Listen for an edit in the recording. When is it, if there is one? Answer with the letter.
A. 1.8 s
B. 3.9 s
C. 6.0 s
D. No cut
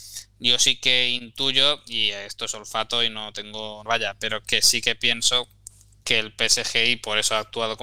B